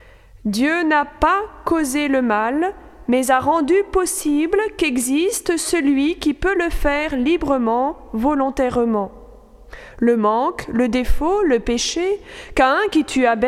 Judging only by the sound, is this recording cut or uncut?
uncut